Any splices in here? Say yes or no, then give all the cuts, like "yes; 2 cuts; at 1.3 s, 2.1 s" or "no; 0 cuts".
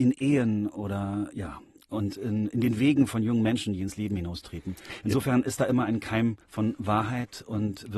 yes; 1 cut; at 6.4 s